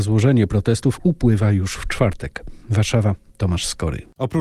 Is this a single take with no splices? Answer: yes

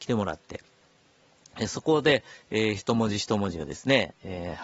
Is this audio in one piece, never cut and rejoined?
yes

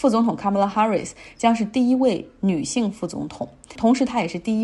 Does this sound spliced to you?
no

